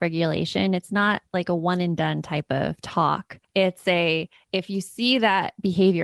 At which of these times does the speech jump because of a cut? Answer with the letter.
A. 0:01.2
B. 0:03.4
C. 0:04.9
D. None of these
B